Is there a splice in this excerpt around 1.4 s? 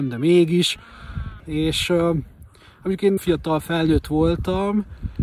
yes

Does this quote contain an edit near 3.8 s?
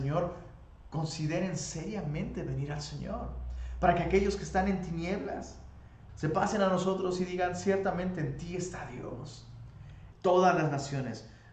no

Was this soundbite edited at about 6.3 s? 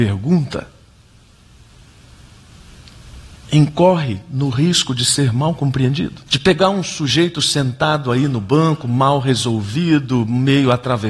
yes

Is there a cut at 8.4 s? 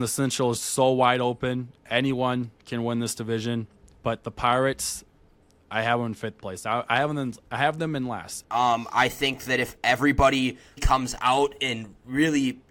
yes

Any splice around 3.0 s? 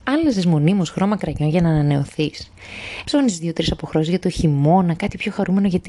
yes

